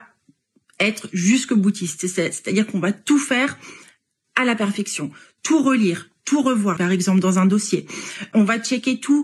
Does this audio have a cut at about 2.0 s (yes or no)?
no